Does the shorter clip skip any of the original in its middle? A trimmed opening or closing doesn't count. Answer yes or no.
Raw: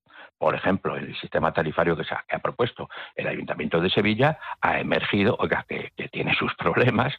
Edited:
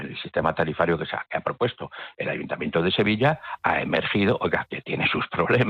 yes